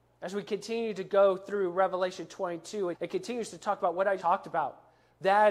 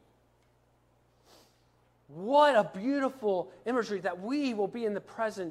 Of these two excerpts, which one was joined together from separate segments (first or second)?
first